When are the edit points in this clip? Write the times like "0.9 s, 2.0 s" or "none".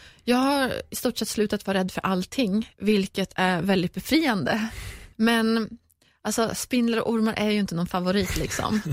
5.1 s